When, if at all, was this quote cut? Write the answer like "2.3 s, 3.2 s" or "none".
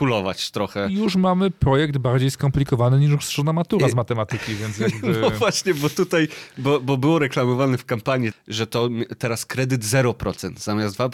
8.3 s